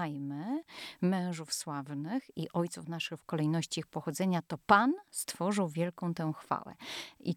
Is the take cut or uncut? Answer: uncut